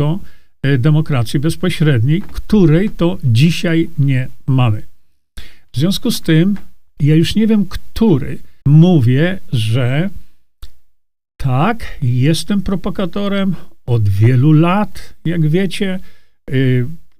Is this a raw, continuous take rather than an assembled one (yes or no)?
no